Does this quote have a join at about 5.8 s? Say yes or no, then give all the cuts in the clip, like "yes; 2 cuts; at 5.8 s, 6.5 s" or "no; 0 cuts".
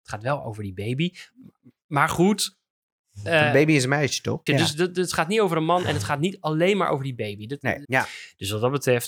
no; 2 cuts; at 4.5 s, 7.8 s